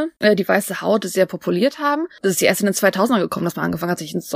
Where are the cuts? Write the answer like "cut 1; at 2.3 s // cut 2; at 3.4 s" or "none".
none